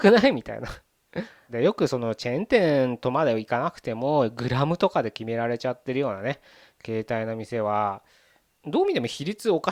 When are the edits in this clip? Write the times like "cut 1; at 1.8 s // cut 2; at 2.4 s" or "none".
cut 1; at 1.5 s // cut 2; at 8.4 s